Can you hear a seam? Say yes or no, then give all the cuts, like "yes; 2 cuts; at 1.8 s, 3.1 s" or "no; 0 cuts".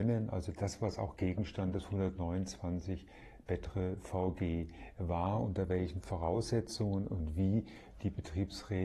no; 0 cuts